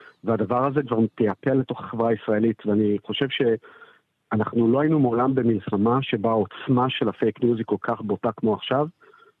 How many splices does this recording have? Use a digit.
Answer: 0